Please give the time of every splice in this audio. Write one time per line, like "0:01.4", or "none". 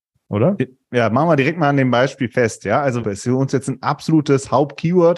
0:03.0